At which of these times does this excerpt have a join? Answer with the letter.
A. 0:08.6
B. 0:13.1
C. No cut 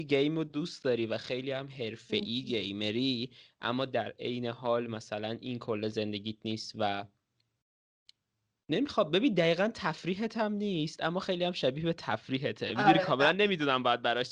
C